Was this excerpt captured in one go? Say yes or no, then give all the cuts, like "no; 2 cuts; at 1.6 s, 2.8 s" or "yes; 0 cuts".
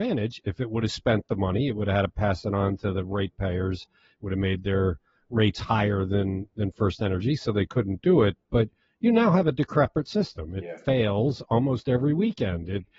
yes; 0 cuts